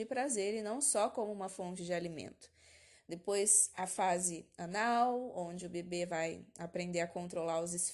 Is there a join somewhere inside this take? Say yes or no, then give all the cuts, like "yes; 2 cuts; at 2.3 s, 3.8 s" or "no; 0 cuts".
no; 0 cuts